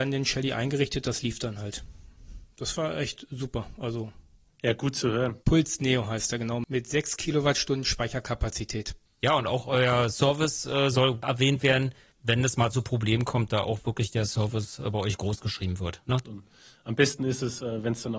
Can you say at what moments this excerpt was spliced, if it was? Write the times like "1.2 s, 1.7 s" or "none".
5.4 s, 16.2 s